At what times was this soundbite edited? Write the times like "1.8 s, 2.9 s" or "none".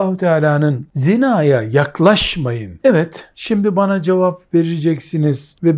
2.8 s